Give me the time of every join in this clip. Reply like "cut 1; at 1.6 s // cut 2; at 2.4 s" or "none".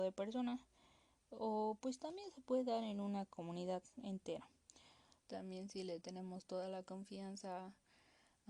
cut 1; at 5.2 s